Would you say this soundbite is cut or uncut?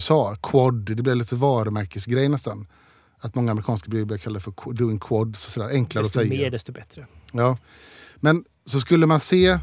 uncut